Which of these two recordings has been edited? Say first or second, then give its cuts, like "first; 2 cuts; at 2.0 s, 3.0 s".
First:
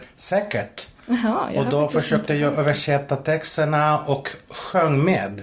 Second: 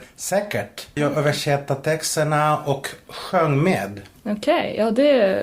second; 1 cut; at 1.0 s